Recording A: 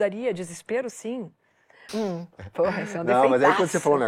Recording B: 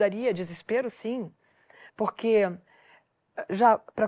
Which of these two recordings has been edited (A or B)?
A